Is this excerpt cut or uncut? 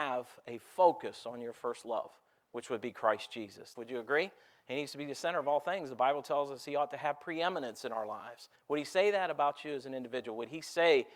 cut